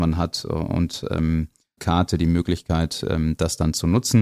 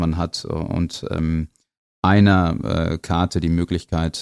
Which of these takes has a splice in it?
first; 1 cut; at 1.8 s

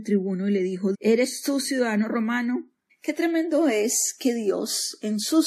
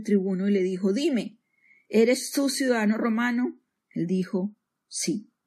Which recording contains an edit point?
first; 2 cuts; at 0.9 s, 2.9 s

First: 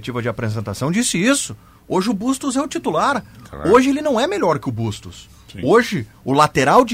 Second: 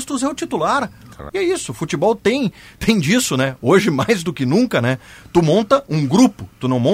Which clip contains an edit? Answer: second; 1 cut; at 1.3 s

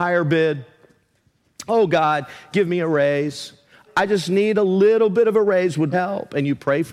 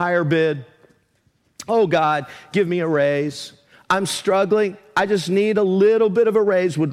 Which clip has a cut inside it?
first; 2 cuts; at 3.9 s, 5.9 s

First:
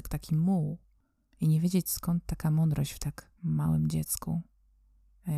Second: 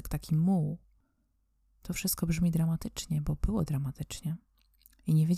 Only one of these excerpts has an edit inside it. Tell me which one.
first; 2 cuts; at 1.3 s, 3.4 s

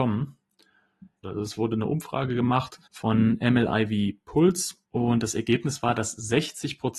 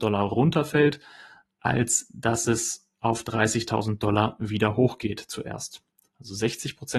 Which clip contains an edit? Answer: first; 3 cuts; at 1.2 s, 2.9 s, 4.8 s

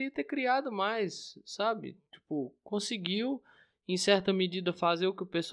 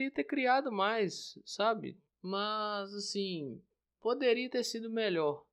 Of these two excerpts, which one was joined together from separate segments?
second; 1 cut; at 2.1 s

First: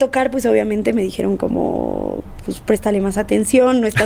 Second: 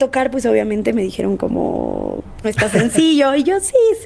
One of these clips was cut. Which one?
second; 1 cut; at 2.4 s

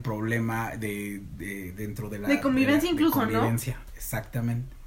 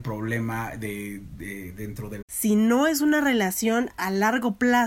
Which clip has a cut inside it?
second; 1 cut; at 2.2 s

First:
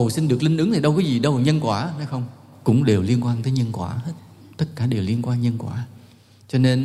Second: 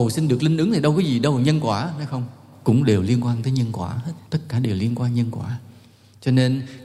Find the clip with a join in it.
second; 1 cut; at 4.3 s

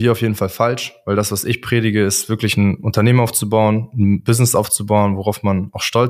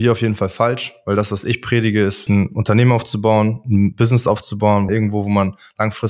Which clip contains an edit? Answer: second; 2 cuts; at 2.3 s, 4.9 s

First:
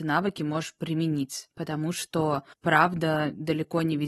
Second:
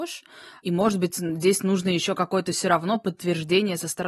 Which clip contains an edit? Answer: first; 1 cut; at 2.5 s

